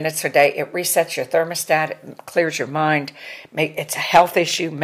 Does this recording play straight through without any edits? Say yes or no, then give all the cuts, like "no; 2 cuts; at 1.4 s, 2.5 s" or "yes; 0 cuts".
yes; 0 cuts